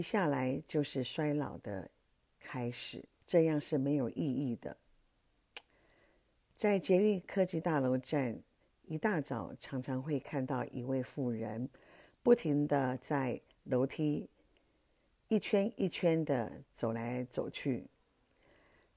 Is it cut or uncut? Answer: cut